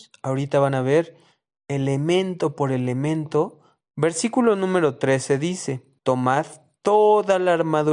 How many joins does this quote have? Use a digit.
2